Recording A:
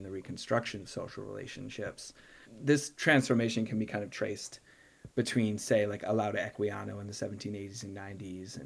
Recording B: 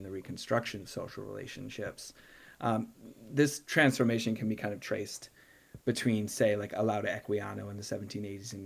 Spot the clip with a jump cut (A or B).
A